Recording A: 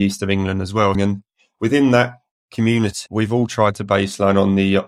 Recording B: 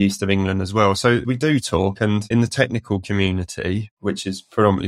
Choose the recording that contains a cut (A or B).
A